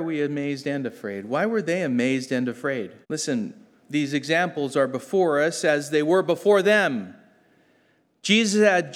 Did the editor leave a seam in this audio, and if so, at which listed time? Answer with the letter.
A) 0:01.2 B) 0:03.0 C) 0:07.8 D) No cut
B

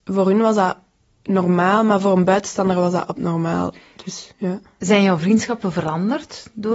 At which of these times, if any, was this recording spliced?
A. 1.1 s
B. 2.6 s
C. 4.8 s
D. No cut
D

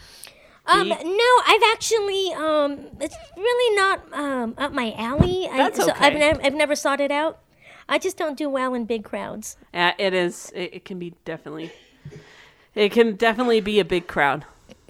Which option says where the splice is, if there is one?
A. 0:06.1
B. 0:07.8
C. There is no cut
C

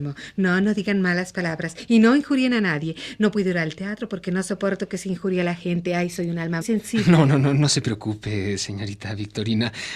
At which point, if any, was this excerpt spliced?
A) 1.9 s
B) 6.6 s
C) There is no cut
B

